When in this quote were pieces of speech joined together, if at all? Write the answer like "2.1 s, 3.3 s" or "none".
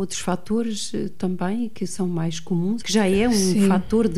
2.8 s